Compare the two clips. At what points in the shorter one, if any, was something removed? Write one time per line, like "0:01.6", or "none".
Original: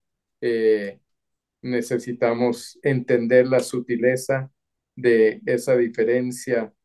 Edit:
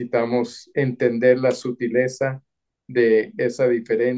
none